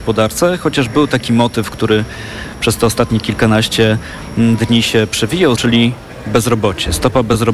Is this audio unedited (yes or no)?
no